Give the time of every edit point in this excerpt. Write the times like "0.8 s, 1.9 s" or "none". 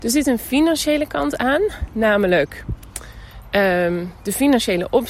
none